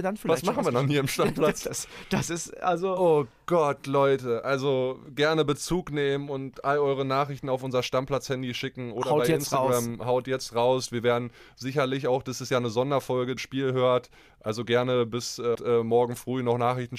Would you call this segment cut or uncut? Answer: cut